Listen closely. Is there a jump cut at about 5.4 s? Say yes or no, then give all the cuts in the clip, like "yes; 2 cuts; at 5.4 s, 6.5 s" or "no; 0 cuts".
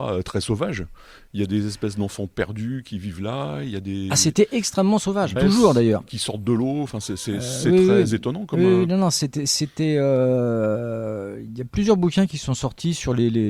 yes; 1 cut; at 5.4 s